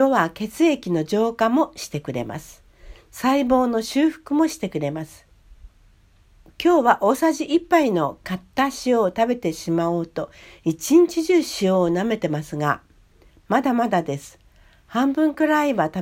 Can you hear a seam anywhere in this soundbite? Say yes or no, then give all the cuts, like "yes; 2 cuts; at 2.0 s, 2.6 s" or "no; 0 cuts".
no; 0 cuts